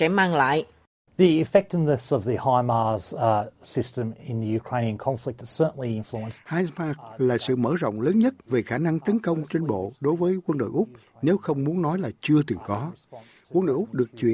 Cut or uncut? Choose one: cut